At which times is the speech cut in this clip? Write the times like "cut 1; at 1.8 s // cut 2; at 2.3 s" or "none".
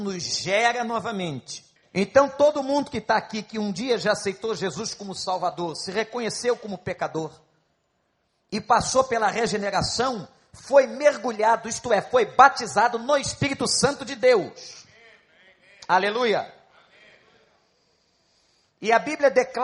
cut 1; at 1.8 s